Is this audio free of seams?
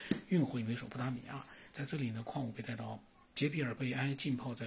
no; 2 cuts; at 1.7 s, 3.2 s

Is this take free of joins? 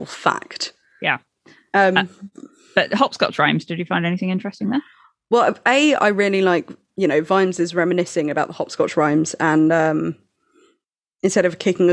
yes; 0 cuts

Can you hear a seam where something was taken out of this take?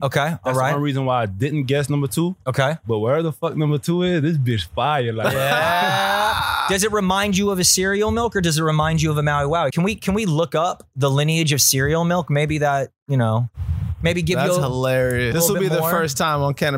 yes; 2 cuts; at 9.7 s, 15.3 s

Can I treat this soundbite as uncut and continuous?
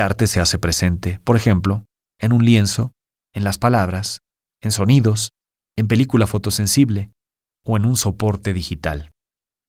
yes; 0 cuts

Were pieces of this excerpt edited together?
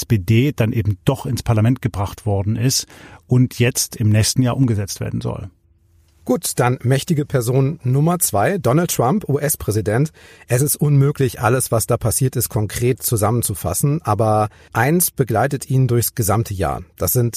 no; 0 cuts

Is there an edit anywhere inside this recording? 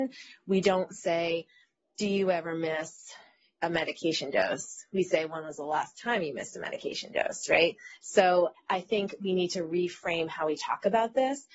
yes; 1 cut; at 8.5 s

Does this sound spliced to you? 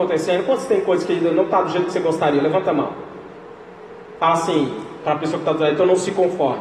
no; 0 cuts

